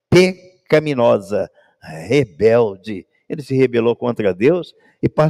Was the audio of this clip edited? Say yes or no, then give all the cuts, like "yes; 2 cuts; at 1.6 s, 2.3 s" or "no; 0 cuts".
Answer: no; 0 cuts